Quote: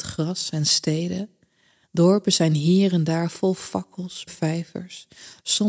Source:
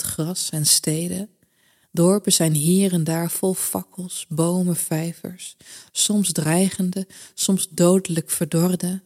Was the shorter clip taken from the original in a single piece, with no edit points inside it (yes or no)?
no